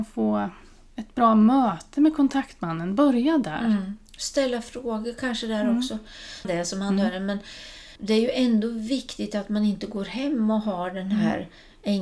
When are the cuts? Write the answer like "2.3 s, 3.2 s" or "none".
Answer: 6.4 s, 8.0 s